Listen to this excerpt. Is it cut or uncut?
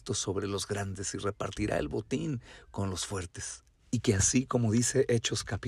cut